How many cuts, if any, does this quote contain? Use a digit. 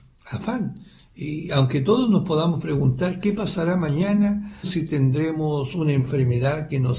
1